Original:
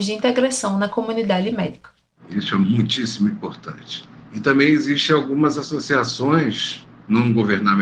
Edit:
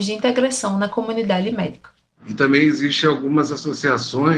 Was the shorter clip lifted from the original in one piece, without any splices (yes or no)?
no